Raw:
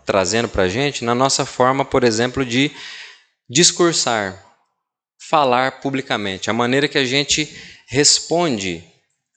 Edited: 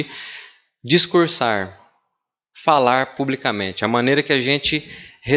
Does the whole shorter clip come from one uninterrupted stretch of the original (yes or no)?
yes